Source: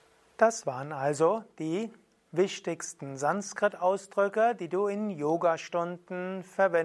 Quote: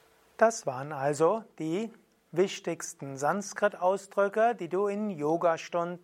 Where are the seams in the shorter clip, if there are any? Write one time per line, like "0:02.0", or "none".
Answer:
none